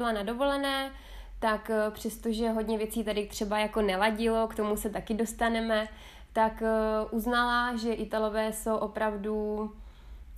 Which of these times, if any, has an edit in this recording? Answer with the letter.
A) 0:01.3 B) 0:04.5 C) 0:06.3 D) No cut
D